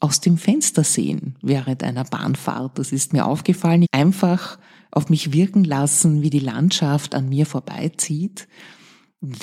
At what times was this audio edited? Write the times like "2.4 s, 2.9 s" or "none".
3.8 s